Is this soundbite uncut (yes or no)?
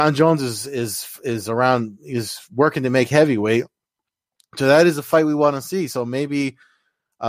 yes